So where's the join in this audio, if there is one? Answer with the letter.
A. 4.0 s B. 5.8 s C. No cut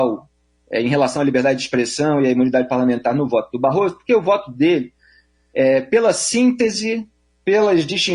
C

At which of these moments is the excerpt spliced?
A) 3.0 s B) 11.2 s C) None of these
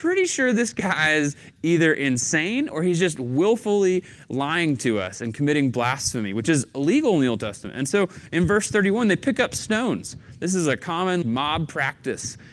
B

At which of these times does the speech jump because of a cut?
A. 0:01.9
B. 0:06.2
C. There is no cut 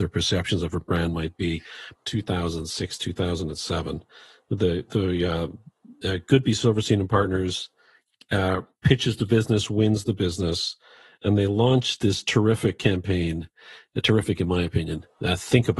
A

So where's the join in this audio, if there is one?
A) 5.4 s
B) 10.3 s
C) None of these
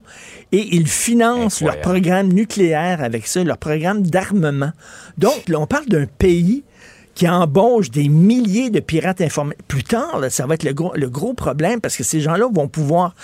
A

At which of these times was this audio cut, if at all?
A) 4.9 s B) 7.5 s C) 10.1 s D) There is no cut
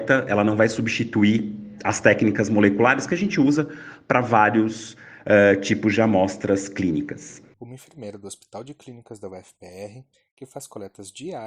B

